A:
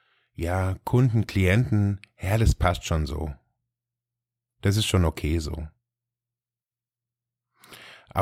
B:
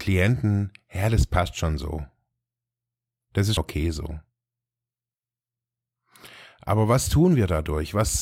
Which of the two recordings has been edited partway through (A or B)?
B